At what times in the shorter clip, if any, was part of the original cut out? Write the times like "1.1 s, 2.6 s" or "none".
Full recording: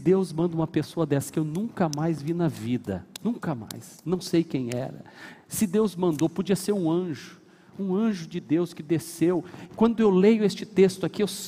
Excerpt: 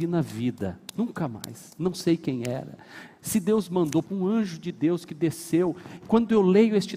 4.0 s